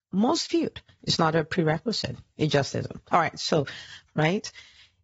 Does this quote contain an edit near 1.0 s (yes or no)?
yes